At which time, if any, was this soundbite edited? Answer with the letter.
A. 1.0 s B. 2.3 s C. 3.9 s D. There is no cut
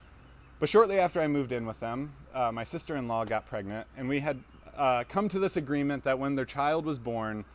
B